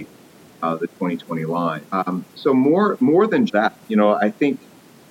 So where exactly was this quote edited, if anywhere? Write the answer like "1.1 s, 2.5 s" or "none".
1.9 s, 3.5 s